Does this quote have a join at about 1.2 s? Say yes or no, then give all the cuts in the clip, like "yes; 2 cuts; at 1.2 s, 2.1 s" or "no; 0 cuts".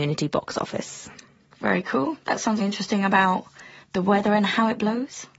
no; 1 cut; at 2.6 s